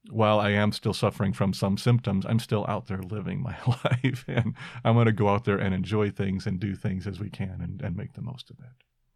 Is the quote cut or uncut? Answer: uncut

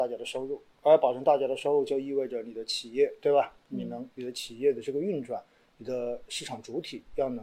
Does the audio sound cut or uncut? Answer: uncut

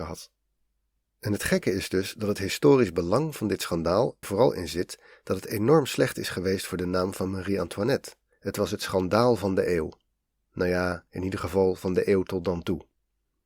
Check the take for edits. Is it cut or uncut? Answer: cut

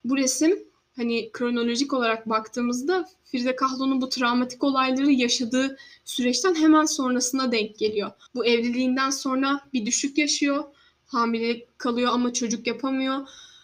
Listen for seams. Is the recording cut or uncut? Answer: cut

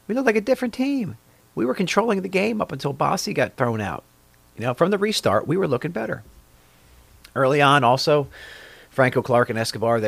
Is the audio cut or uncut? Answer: uncut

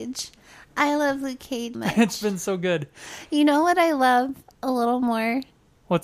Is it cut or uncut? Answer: cut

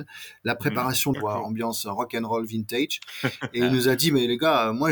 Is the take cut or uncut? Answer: cut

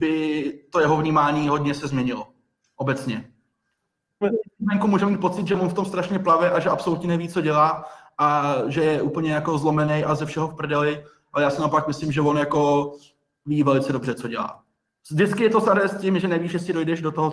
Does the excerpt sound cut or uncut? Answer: cut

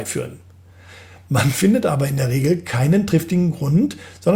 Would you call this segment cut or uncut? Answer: uncut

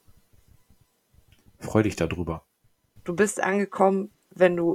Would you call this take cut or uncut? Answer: cut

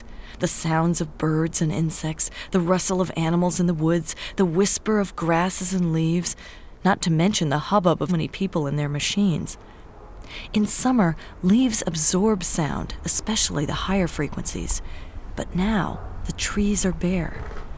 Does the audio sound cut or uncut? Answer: cut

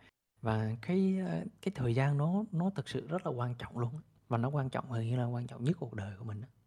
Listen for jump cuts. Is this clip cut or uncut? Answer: cut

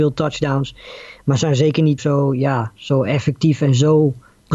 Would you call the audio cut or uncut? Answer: cut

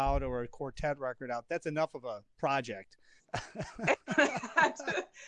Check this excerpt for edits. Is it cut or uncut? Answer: cut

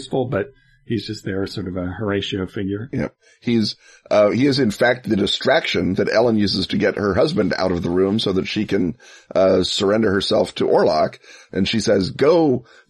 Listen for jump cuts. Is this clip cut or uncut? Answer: uncut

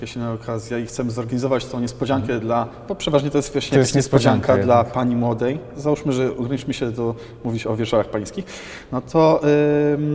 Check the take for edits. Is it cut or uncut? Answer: uncut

